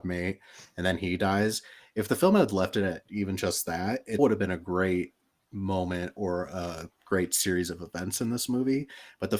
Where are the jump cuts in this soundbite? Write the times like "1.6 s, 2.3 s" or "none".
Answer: 4.2 s